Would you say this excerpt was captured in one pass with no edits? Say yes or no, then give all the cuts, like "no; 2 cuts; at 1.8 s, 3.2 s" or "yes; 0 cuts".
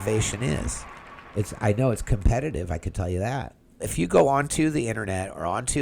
no; 1 cut; at 3.8 s